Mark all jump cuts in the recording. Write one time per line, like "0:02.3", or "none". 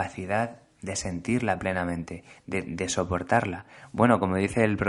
none